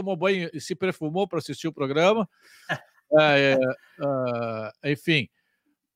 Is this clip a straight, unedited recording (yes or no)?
yes